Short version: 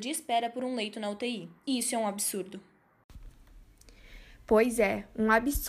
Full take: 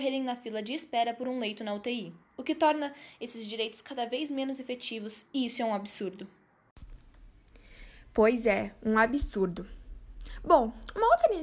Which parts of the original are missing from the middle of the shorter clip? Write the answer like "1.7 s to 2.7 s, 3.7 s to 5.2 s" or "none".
2.3 s to 5.3 s